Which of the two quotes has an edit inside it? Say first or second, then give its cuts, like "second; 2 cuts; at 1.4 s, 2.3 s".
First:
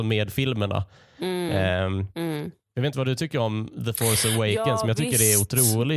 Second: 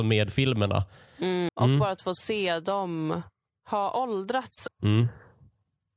second; 2 cuts; at 1.5 s, 4.7 s